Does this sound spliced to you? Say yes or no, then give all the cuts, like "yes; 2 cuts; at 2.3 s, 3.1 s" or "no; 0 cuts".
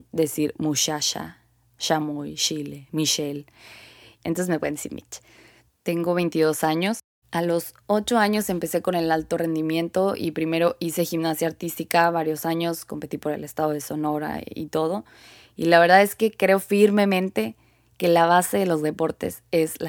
yes; 2 cuts; at 4.2 s, 7.2 s